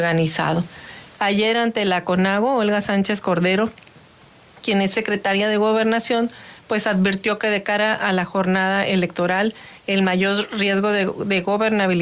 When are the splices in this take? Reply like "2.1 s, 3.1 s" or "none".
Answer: 1.2 s